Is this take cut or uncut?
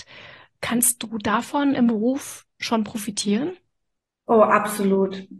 uncut